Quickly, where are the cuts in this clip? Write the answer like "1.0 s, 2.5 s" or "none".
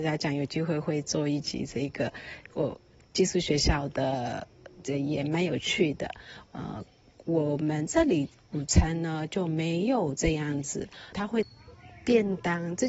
6.5 s, 11.1 s